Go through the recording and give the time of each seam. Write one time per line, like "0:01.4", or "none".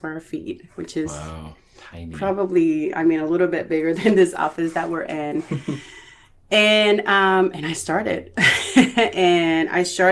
none